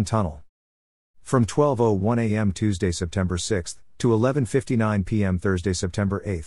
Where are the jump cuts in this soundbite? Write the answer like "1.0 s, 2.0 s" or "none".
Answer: none